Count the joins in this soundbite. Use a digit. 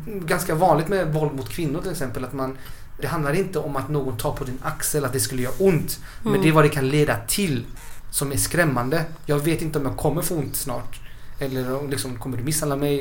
1